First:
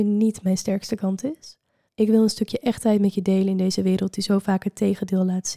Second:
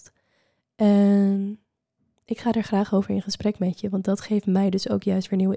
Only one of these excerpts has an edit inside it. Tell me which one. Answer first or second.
first